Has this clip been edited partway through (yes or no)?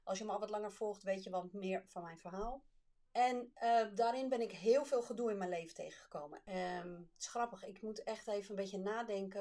yes